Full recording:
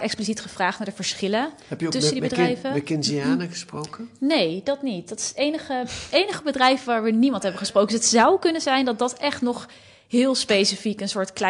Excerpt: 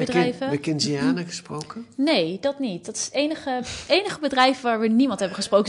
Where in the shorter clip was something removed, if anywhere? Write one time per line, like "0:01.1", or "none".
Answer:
none